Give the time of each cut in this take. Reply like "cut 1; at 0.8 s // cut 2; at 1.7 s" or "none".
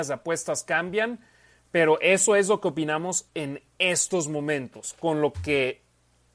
none